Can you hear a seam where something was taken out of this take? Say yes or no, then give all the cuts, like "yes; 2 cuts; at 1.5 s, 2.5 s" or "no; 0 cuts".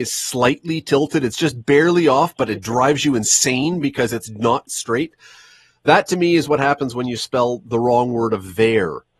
yes; 1 cut; at 4.7 s